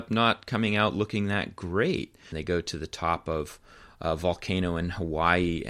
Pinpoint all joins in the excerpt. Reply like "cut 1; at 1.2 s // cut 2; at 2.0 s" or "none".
cut 1; at 2.3 s